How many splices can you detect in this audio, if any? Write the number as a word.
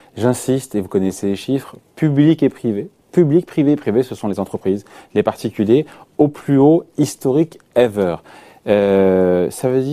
zero